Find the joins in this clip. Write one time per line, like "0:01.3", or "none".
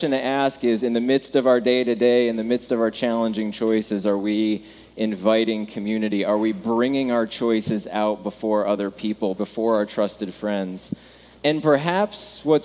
0:09.4
0:11.3